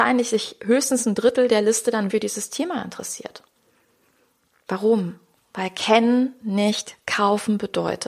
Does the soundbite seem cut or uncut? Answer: cut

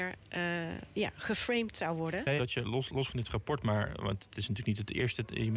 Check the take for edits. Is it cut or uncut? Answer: cut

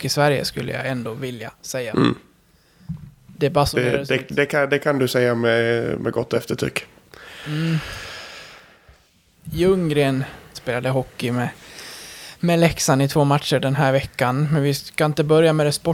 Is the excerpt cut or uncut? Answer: cut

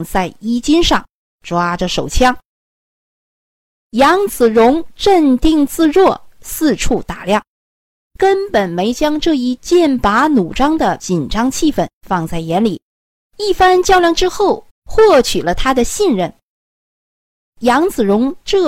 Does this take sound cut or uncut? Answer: cut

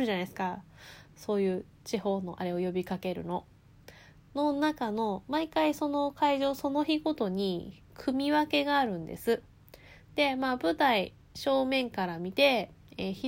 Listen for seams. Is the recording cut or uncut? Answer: uncut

